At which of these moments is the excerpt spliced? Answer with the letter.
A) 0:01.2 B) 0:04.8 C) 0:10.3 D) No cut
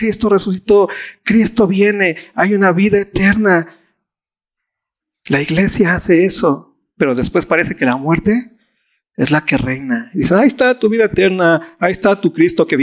D